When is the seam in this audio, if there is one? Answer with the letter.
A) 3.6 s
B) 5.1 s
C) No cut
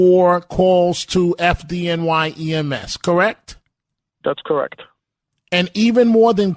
C